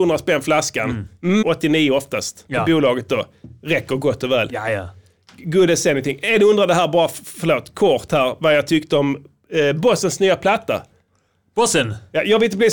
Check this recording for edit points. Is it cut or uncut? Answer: cut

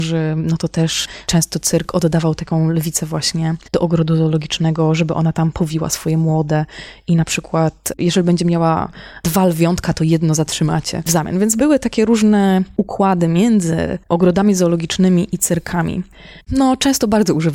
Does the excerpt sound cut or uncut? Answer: cut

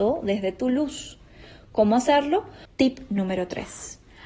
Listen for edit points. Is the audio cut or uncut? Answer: cut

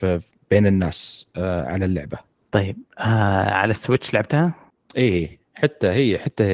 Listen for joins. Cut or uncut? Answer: uncut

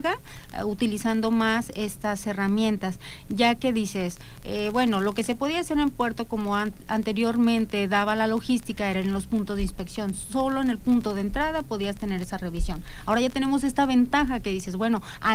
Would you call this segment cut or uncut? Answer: uncut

